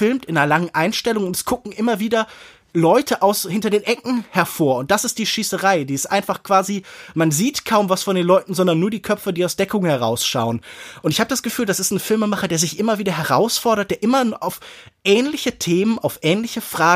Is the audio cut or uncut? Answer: uncut